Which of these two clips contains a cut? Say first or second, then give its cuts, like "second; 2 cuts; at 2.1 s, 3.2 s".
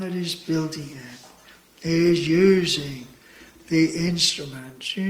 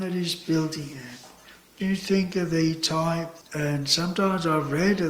second; 2 cuts; at 1.8 s, 3.4 s